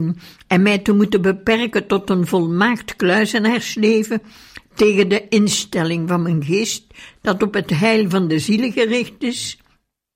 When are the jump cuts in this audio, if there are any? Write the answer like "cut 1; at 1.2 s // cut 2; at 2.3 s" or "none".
cut 1; at 7.1 s